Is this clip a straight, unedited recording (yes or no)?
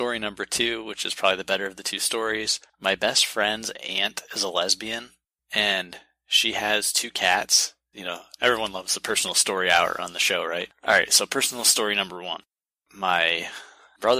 no